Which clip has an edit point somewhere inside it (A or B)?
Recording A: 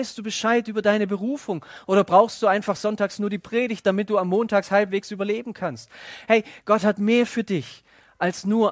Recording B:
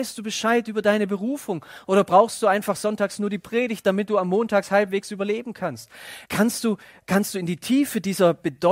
B